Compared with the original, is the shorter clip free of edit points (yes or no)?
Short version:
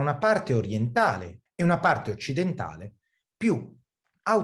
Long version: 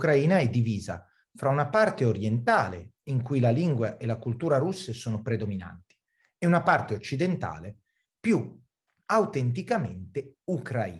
no